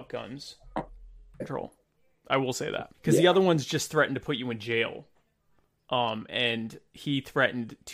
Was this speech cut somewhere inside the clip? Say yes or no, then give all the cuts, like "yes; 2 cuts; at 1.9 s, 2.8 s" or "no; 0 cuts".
yes; 2 cuts; at 1.4 s, 2.9 s